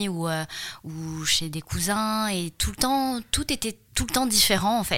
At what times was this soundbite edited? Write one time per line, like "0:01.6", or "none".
0:03.9